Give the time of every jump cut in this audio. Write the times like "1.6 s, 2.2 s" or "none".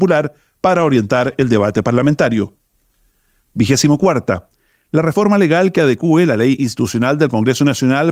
none